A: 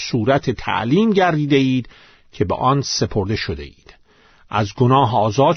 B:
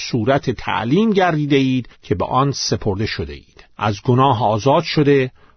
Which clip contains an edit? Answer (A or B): B